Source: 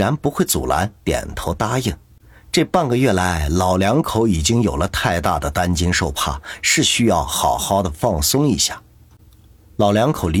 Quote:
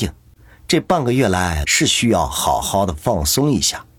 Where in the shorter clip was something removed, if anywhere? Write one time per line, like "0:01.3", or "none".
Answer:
0:01.6